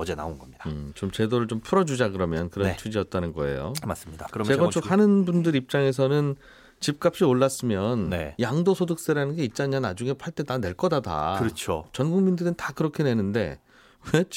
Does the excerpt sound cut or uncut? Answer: uncut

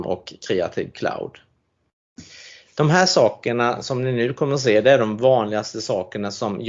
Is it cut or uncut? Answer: uncut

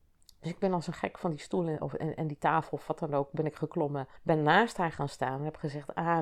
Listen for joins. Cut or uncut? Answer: cut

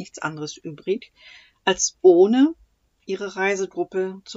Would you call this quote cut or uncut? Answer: uncut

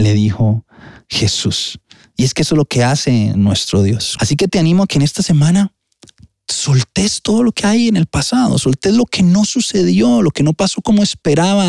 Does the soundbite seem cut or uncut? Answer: cut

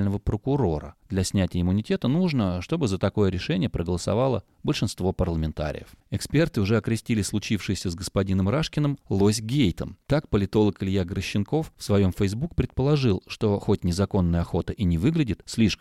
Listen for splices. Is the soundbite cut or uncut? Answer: uncut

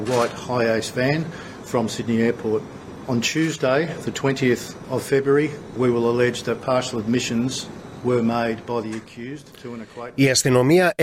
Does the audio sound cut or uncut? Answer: cut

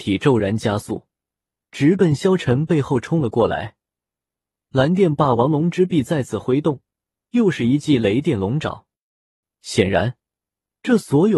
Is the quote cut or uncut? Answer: cut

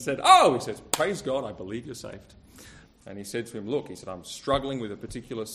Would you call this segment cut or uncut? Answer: cut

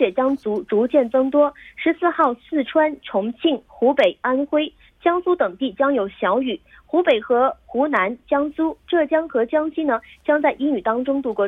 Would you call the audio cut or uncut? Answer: uncut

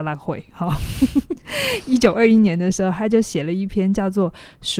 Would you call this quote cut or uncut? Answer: uncut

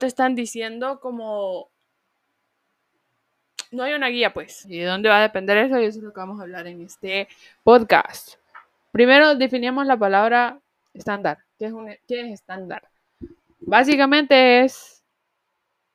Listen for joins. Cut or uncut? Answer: cut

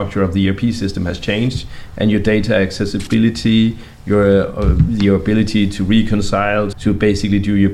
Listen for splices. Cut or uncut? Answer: cut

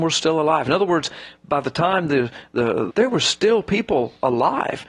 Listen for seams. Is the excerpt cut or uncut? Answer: cut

